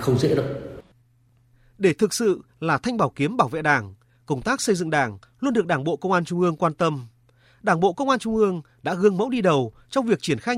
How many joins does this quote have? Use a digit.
0